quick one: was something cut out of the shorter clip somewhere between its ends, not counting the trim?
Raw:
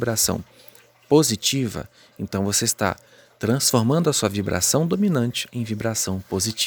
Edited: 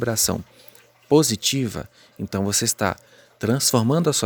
no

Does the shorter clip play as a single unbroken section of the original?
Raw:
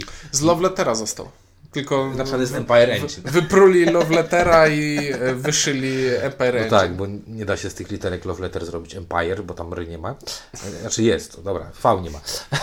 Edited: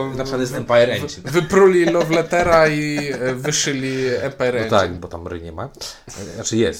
no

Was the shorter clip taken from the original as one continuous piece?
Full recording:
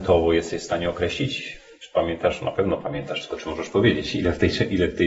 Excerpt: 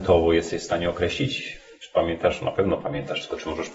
yes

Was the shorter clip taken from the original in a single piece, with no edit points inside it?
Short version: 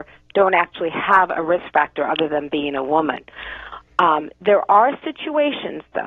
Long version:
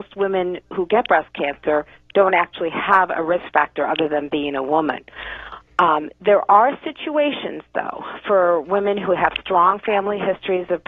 yes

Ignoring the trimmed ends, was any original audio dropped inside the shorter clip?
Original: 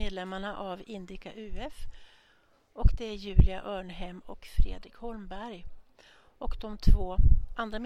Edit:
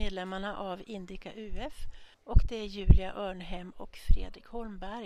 yes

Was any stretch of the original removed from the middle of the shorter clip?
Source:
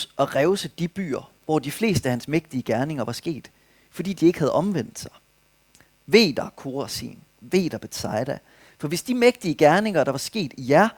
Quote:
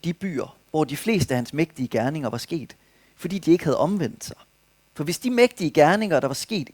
yes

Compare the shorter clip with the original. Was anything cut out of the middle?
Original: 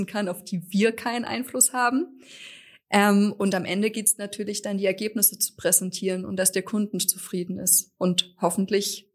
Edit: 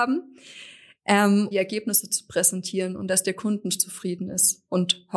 yes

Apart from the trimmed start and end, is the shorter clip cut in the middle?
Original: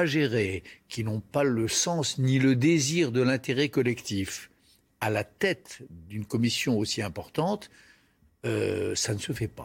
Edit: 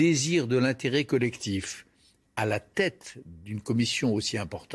no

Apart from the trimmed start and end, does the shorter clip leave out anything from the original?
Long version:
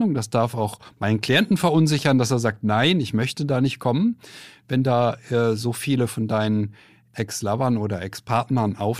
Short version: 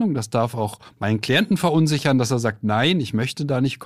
no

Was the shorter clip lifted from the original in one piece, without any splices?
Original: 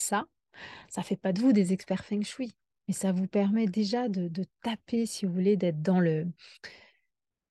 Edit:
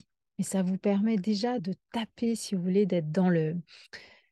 no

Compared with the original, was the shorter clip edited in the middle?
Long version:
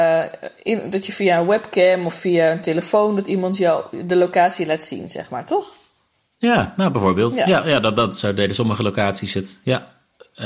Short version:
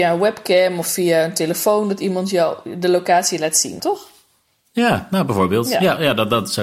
yes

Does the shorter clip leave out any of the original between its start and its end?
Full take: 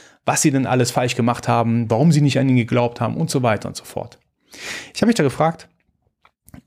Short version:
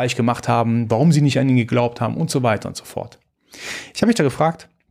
no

